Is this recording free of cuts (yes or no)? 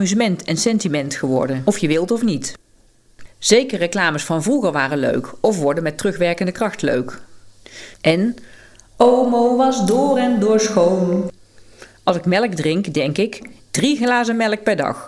no